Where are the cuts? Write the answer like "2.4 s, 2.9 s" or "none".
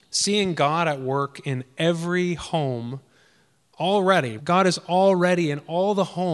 4.4 s